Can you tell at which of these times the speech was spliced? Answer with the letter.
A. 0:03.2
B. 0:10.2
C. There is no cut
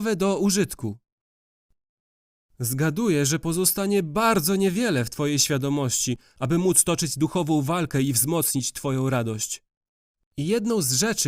B